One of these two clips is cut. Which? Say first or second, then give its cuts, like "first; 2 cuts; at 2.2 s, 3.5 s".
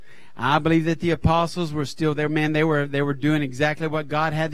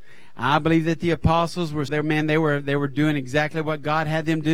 second; 1 cut; at 1.9 s